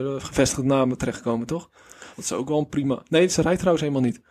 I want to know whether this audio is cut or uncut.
cut